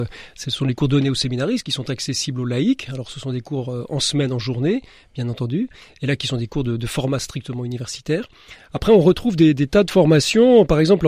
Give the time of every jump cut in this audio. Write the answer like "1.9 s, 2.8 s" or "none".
none